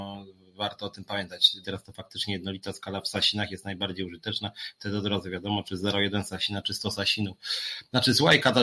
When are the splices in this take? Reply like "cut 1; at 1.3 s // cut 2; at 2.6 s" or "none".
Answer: cut 1; at 1.6 s